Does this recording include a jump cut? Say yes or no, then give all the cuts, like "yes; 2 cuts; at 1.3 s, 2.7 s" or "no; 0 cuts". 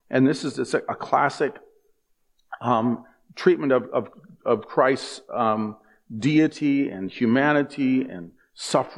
no; 0 cuts